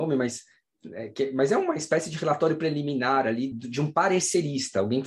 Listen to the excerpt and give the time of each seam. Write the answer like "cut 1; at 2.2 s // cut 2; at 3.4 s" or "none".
cut 1; at 3.5 s